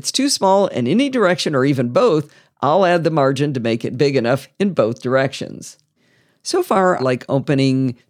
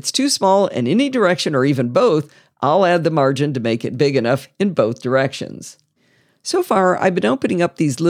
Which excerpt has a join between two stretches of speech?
first; 1 cut; at 7.0 s

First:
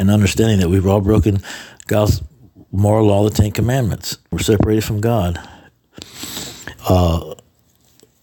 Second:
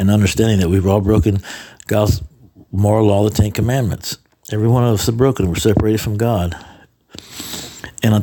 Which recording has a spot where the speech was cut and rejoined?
first; 2 cuts; at 4.3 s, 6.8 s

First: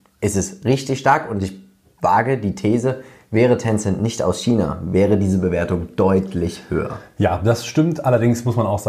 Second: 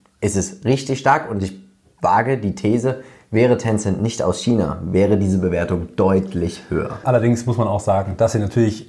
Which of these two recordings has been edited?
second; 1 cut; at 7.0 s

